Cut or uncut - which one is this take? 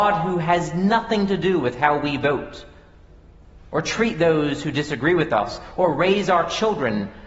cut